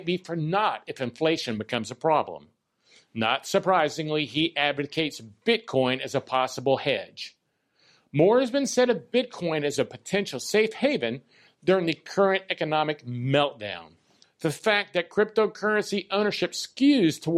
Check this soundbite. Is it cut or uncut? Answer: cut